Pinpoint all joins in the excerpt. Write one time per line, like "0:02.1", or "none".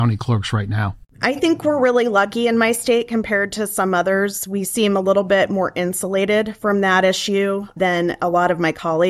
none